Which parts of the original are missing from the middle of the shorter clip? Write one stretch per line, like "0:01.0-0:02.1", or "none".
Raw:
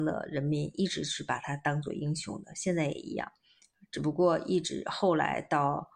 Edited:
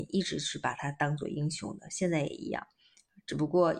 none